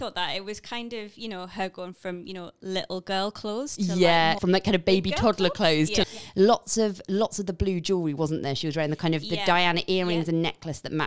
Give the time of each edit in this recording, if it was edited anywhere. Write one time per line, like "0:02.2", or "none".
0:04.4
0:06.0